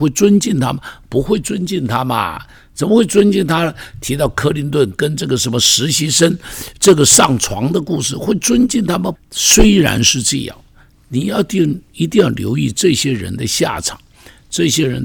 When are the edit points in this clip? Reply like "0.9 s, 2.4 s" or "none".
9.1 s